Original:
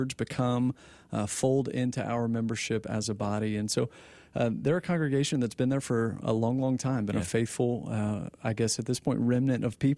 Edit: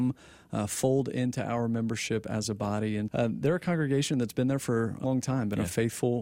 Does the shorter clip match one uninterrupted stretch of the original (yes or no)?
no